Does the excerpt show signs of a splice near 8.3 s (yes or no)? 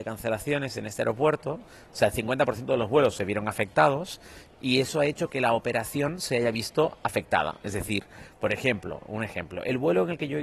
no